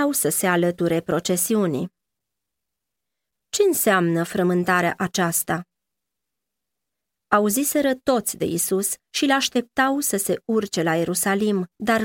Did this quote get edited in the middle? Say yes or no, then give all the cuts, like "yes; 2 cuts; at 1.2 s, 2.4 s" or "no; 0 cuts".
yes; 1 cut; at 3.3 s